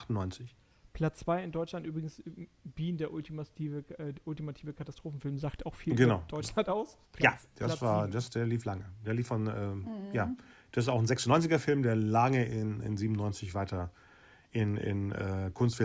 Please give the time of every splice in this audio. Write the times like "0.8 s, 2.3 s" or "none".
7.0 s